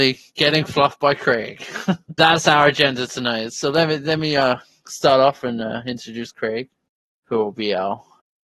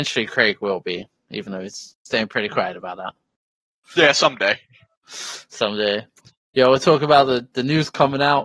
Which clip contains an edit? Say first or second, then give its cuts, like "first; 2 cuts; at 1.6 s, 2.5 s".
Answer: first; 1 cut; at 2.2 s